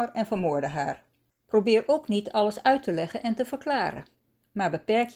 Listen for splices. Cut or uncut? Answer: cut